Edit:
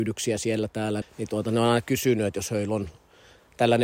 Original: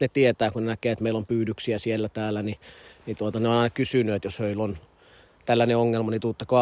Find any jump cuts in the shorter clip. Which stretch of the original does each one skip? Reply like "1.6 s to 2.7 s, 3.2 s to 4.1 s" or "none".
2.4 s to 2.9 s